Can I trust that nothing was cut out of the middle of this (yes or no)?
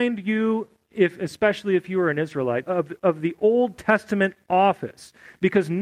no